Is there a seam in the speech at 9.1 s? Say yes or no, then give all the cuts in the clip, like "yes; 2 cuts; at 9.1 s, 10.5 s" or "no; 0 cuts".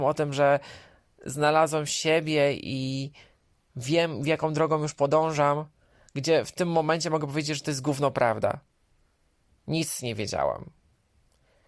no; 0 cuts